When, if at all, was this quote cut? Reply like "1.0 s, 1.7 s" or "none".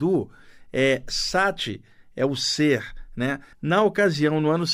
3.5 s